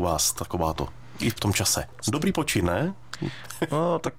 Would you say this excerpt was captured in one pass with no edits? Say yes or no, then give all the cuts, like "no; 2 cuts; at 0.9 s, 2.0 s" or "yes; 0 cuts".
no; 1 cut; at 2.0 s